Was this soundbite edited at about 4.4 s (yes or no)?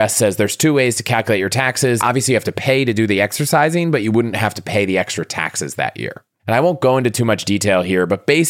no